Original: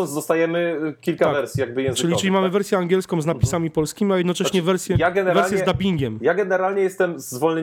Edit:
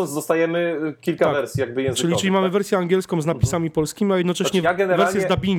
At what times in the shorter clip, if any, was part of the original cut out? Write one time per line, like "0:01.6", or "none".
0:04.6